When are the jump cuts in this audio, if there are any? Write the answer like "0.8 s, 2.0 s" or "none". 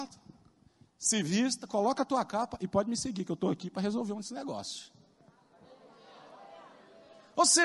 none

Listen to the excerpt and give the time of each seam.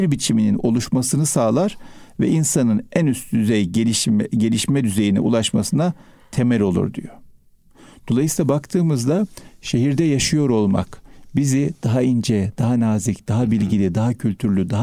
none

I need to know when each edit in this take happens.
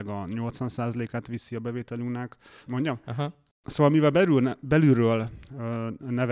2.7 s

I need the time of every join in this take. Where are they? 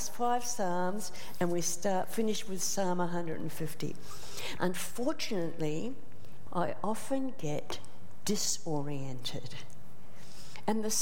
4.6 s, 6.5 s

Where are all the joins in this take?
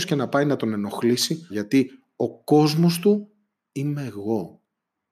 1.5 s

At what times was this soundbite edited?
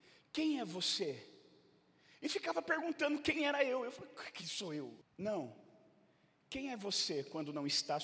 5.0 s

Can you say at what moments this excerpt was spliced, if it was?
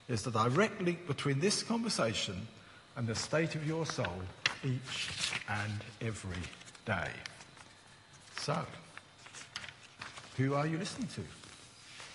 none

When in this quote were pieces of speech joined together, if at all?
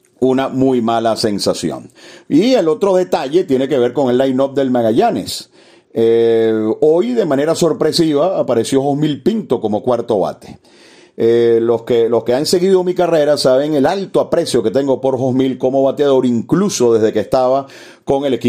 none

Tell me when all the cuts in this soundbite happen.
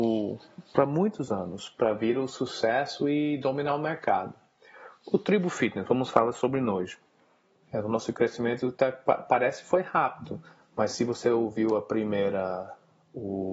7.6 s

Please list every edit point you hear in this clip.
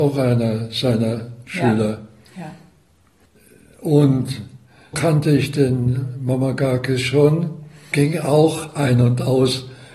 4.9 s, 7.9 s

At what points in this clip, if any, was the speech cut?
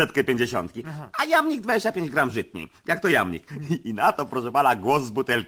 none

